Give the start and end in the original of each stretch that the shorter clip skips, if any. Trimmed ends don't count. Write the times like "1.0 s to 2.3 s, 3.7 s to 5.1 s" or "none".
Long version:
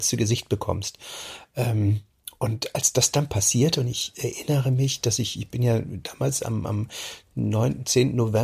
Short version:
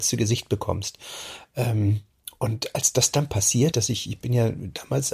3.7 s to 5.0 s